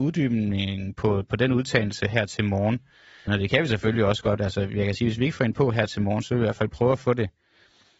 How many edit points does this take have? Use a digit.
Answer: 1